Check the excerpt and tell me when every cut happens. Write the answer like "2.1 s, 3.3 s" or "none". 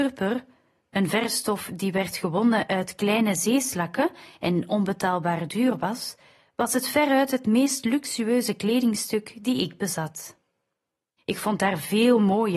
11.2 s